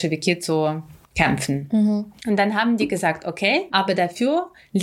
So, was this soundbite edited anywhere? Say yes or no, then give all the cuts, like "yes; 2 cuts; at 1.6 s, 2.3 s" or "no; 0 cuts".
yes; 2 cuts; at 2.2 s, 3.7 s